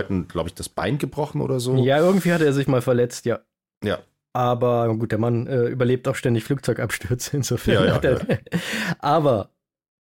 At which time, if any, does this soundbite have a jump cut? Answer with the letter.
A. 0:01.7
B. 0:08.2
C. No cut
B